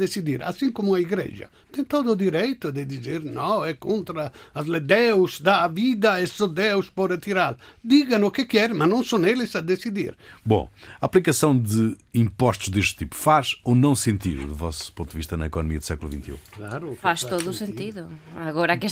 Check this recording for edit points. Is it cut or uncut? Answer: cut